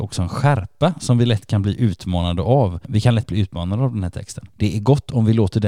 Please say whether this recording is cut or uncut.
uncut